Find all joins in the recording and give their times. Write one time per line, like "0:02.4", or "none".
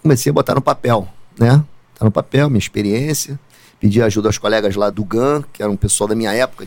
0:04.9